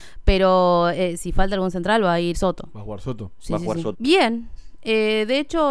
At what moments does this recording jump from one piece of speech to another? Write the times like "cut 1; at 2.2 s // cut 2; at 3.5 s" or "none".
cut 1; at 2.3 s // cut 2; at 3.9 s